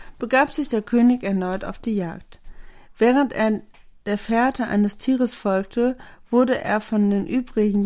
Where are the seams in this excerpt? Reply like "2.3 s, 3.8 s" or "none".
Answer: none